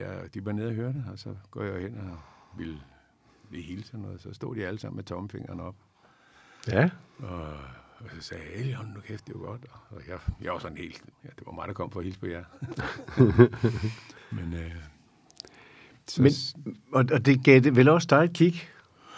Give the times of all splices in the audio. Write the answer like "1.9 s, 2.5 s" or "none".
11.1 s